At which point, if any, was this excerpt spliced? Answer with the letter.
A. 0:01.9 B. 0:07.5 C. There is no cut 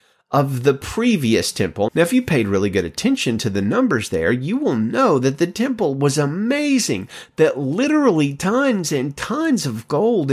A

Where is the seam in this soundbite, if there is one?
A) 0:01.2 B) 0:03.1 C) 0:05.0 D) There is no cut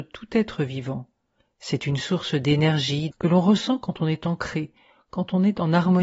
B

